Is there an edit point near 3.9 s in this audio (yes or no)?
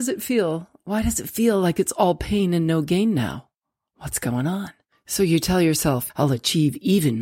no